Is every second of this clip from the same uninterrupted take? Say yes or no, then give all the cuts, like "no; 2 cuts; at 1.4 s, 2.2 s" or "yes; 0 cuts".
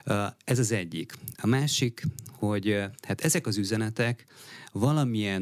yes; 0 cuts